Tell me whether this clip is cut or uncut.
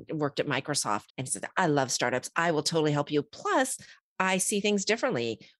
cut